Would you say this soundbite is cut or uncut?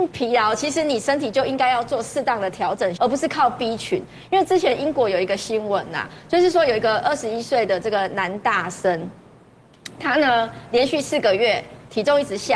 cut